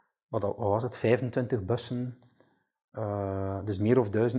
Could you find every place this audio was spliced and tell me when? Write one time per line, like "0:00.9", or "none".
none